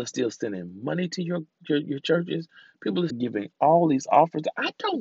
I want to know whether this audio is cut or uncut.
cut